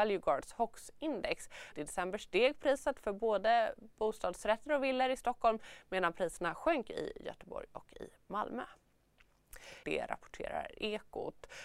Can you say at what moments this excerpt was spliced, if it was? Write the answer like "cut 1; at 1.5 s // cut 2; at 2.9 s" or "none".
cut 1; at 1.7 s // cut 2; at 9.8 s